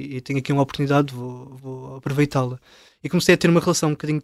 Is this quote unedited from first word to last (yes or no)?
no